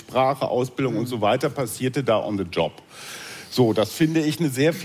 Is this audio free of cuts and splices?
yes; 0 cuts

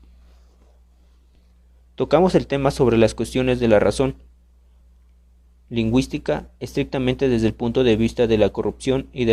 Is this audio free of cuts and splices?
yes; 0 cuts

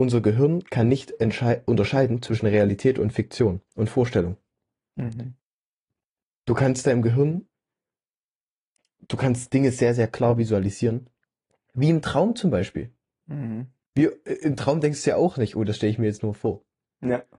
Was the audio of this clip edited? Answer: no; 0 cuts

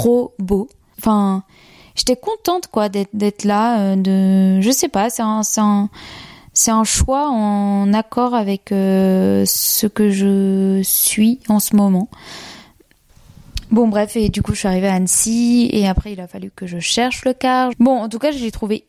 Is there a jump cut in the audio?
yes; 2 cuts; at 0.9 s, 17.7 s

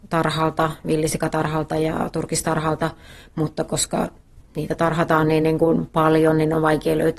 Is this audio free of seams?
yes; 0 cuts

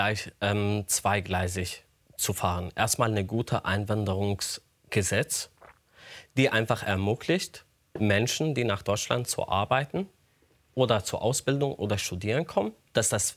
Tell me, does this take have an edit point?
no; 0 cuts

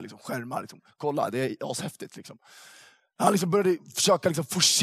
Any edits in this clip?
no; 0 cuts

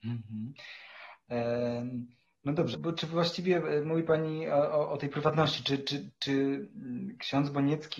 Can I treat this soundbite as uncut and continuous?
no; 1 cut; at 2.7 s

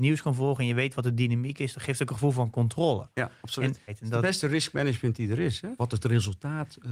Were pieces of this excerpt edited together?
yes; 2 cuts; at 3.9 s, 5.8 s

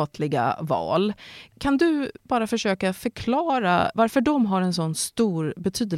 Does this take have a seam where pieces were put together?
yes; 1 cut; at 3.9 s

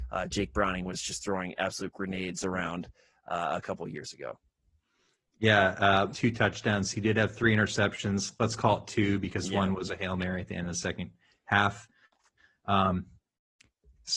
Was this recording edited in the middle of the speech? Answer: yes; 1 cut; at 6.1 s

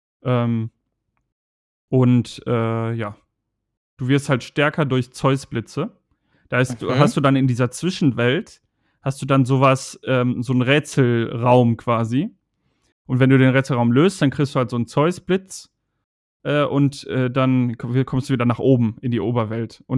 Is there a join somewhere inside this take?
no; 0 cuts

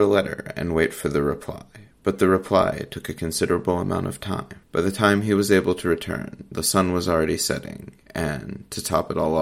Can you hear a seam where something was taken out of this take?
yes; 1 cut; at 4.6 s

